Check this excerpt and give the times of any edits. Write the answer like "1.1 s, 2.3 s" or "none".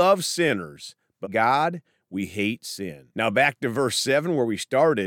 1.2 s, 3.1 s